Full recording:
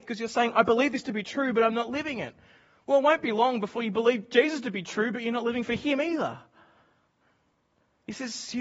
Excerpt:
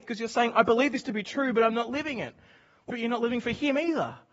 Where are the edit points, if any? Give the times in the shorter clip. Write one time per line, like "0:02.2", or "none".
0:02.9